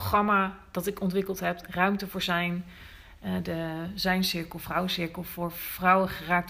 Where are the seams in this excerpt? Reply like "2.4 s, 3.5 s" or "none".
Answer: none